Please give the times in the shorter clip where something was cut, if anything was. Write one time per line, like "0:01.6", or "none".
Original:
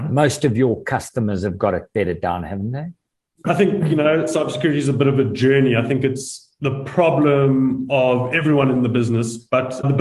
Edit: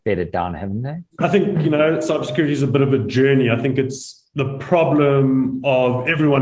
0:01.1